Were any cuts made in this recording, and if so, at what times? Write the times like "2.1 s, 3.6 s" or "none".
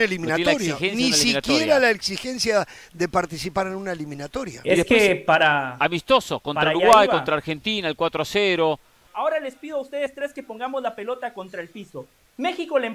9.1 s